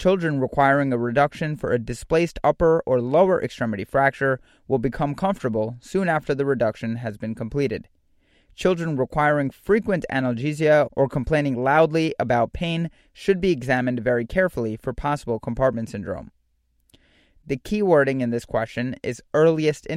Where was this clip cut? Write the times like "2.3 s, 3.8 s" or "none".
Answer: none